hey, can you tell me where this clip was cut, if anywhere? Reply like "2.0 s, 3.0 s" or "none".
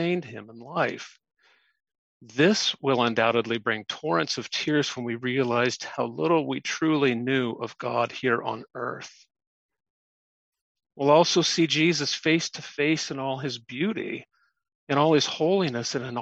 5.8 s